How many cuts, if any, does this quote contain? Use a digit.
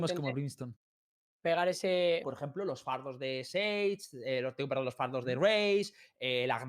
1